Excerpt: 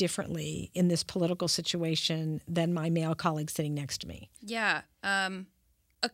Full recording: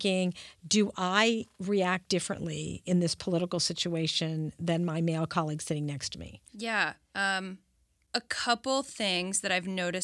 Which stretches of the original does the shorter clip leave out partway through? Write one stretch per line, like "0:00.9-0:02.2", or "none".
none